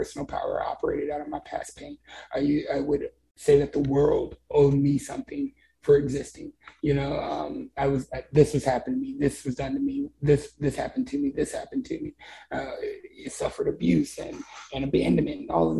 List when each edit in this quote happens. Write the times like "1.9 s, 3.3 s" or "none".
13.2 s